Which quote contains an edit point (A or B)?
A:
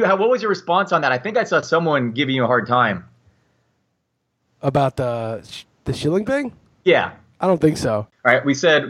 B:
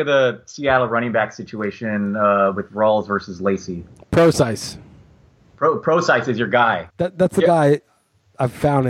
B